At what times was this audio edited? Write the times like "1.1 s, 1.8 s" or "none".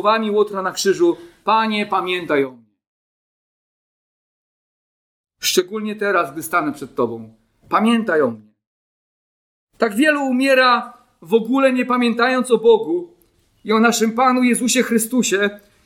none

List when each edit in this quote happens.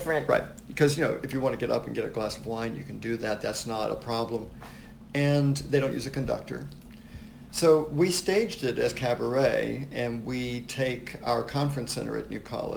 5.1 s

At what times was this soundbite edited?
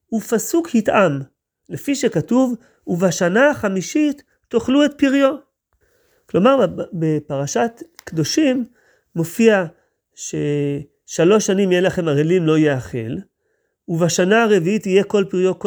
1.6 s

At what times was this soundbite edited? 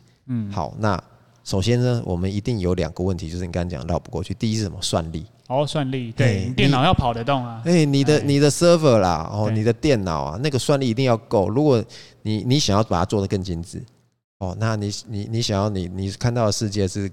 none

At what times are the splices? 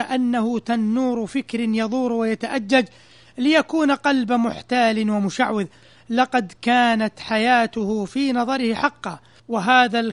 none

